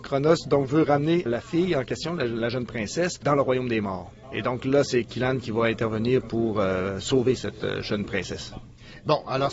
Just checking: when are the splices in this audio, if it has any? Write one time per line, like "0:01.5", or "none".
none